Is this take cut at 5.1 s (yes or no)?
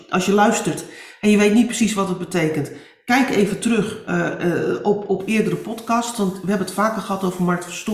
no